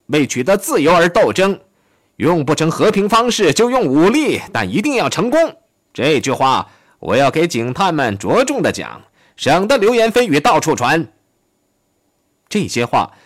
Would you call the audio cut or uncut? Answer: uncut